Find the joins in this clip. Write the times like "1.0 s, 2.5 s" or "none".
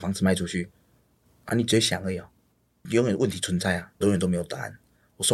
1.5 s, 4.0 s